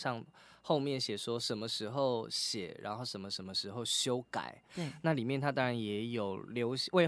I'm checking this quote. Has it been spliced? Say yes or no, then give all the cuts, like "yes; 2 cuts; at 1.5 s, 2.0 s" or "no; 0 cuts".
yes; 1 cut; at 4.7 s